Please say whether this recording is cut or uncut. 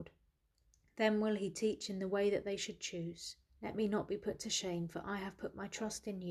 cut